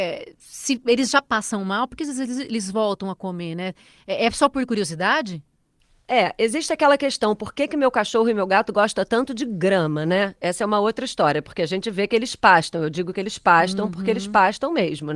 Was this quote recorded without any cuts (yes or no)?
yes